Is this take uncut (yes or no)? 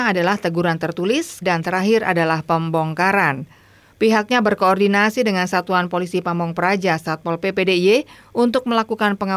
no